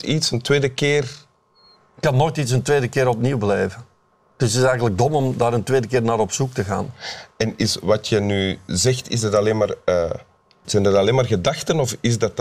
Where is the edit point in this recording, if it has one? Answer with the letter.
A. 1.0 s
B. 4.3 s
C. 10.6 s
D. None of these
C